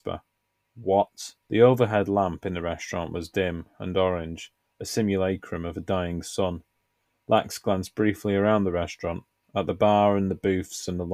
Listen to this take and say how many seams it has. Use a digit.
1